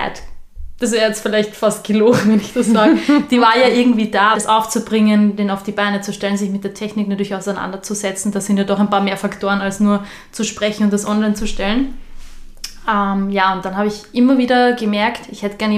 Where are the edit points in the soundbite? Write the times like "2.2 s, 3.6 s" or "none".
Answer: 4.3 s